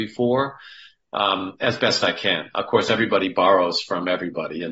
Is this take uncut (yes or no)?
yes